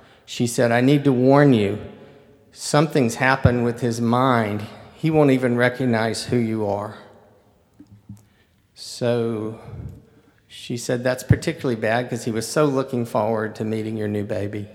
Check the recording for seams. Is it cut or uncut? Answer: uncut